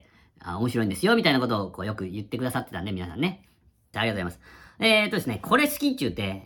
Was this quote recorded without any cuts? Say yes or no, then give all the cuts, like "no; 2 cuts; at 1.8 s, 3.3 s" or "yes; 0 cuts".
no; 1 cut; at 3.9 s